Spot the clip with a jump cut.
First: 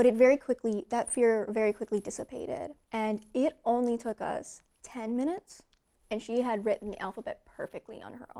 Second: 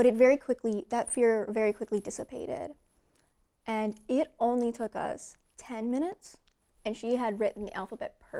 first; 1 cut; at 2.8 s

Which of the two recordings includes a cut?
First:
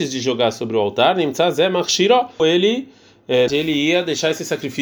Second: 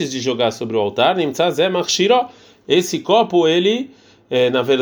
first; 2 cuts; at 2.4 s, 3.5 s

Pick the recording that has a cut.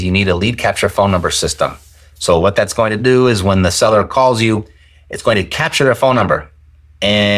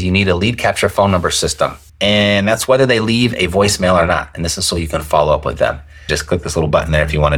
second; 2 cuts; at 1.9 s, 6.1 s

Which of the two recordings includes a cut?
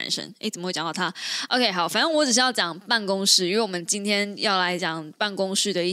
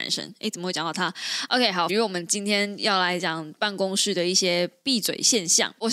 second; 1 cut; at 1.9 s

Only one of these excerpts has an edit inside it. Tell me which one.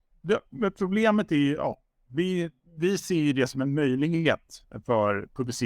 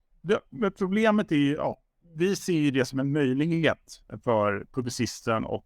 second; 1 cut; at 2.0 s

